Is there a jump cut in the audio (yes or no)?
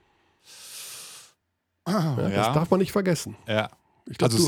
no